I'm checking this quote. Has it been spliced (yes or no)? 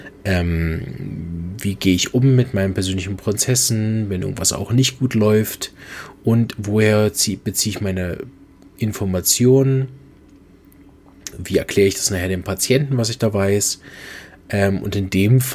no